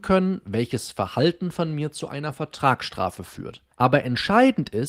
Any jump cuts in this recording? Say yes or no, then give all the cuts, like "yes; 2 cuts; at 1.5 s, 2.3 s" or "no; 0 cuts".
yes; 1 cut; at 3.7 s